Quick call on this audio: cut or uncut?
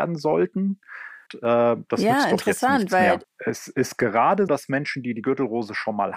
cut